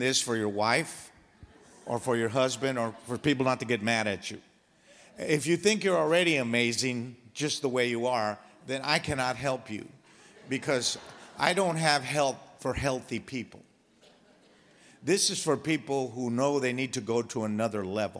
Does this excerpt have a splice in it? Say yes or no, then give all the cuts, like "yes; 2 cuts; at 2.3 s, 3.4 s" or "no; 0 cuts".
no; 0 cuts